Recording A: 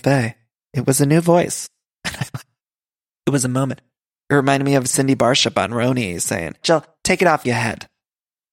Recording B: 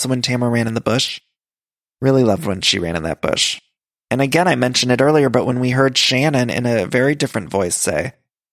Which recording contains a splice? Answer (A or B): A